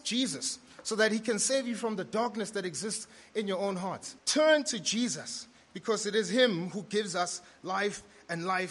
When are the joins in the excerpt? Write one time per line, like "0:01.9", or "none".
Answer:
0:04.2